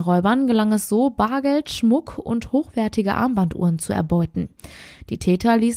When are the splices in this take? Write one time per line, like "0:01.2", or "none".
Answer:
none